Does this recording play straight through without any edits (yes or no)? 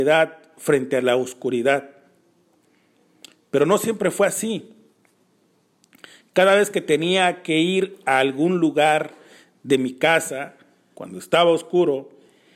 no